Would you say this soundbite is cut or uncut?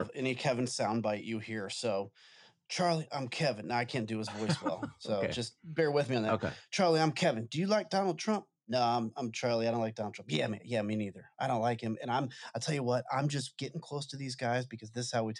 uncut